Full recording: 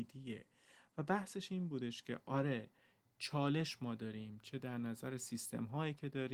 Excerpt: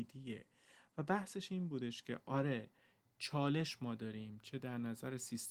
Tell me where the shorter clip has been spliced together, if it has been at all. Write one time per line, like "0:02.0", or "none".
none